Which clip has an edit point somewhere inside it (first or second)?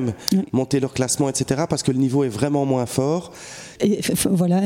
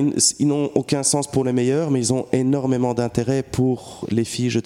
first